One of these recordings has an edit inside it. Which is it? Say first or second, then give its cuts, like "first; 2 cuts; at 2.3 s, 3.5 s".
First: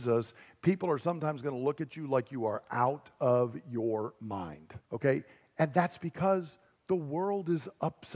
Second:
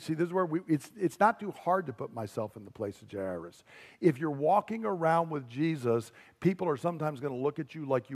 first; 1 cut; at 4.8 s